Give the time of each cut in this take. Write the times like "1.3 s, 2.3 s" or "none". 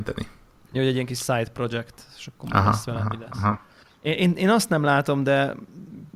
none